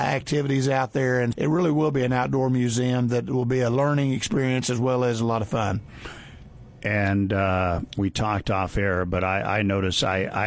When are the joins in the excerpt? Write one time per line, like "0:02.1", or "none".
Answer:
0:01.3